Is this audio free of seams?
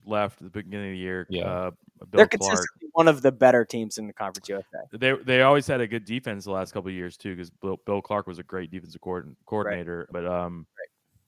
no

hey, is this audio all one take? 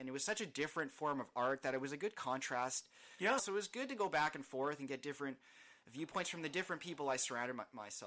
no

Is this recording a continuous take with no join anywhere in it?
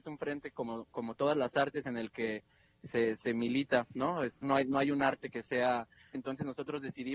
no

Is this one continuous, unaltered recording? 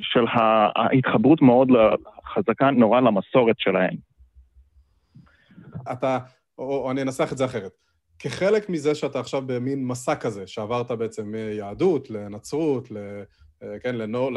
no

